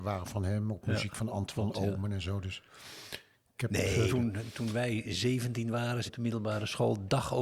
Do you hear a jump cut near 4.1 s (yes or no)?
yes